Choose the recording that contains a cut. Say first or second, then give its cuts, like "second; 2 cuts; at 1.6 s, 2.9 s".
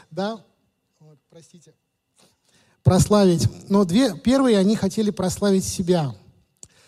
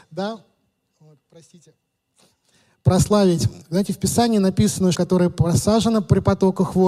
second; 2 cuts; at 3.6 s, 4.9 s